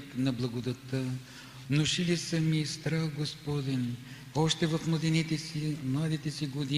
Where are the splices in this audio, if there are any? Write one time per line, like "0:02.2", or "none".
0:01.6
0:04.3